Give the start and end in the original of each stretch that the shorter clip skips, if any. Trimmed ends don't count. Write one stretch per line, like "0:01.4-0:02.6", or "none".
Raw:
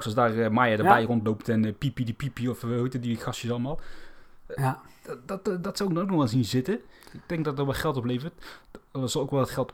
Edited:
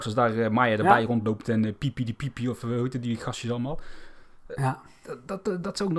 none